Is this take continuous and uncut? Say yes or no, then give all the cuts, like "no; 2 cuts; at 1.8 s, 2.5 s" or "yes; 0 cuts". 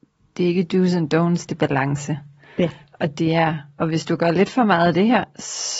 no; 1 cut; at 1.5 s